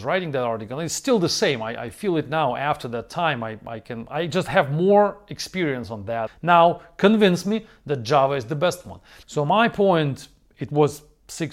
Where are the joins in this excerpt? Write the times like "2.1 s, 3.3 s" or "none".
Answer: 6.3 s, 9.2 s